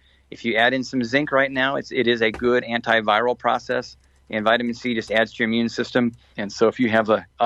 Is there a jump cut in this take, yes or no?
yes